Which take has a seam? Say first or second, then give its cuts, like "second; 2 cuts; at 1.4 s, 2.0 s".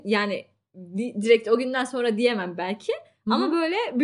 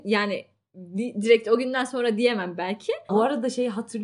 second; 1 cut; at 3.1 s